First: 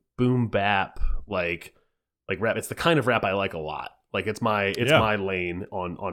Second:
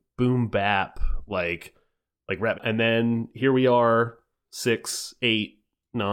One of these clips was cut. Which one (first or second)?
second